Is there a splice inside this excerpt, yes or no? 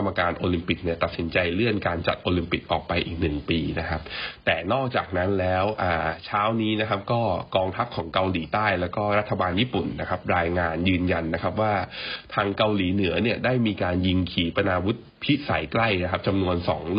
no